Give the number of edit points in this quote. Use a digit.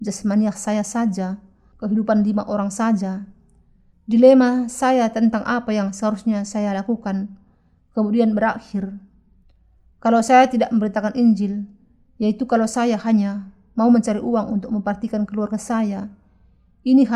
2